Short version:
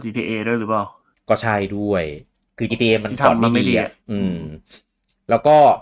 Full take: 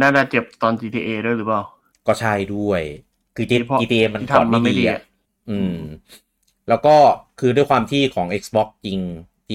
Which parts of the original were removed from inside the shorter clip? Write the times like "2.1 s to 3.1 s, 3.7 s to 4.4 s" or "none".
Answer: 3.5 s to 3.8 s, 5.1 s to 5.4 s